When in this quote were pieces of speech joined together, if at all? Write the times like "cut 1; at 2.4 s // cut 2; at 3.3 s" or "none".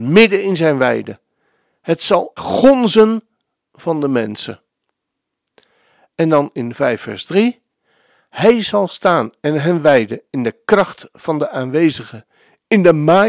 cut 1; at 2.4 s

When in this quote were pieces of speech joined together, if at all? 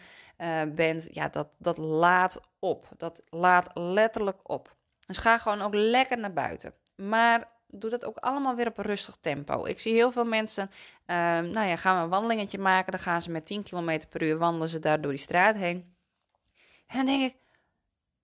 none

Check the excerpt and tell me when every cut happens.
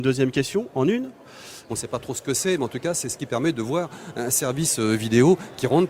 cut 1; at 1.7 s

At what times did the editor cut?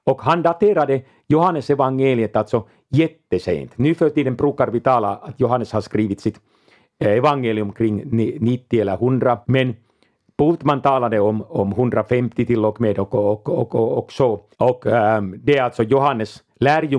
cut 1; at 9.4 s // cut 2; at 14.5 s

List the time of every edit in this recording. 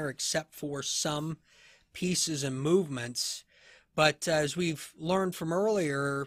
none

